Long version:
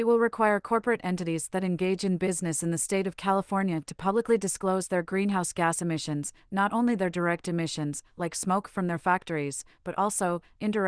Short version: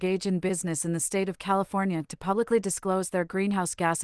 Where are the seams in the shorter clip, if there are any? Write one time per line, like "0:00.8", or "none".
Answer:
none